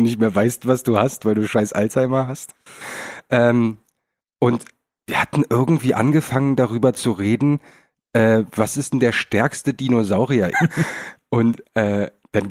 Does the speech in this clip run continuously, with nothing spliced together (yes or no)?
no